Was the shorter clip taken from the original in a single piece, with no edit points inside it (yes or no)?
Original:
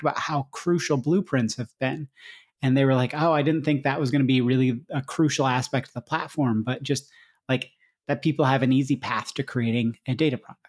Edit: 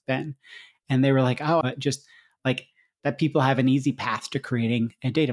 no